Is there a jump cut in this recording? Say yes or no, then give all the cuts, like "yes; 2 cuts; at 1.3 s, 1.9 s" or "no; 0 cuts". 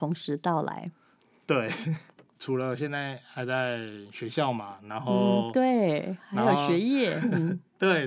no; 0 cuts